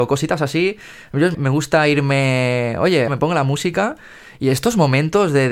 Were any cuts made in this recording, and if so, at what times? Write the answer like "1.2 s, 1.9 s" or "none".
1.3 s, 3.1 s